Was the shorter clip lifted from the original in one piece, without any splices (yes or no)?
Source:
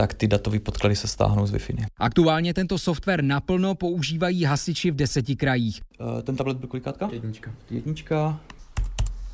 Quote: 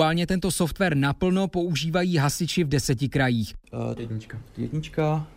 no